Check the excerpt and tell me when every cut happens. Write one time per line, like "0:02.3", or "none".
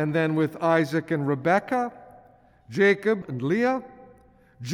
0:03.2